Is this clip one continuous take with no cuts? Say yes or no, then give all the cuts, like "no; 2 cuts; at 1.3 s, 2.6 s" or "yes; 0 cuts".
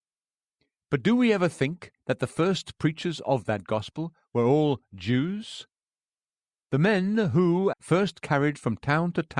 no; 1 cut; at 7.7 s